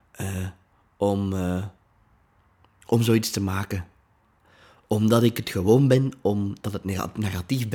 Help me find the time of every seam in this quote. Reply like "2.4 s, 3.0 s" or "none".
none